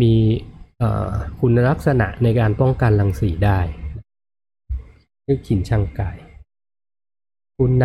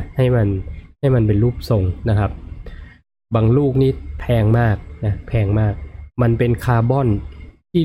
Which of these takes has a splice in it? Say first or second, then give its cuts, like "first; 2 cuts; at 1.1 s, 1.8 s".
second; 1 cut; at 6.1 s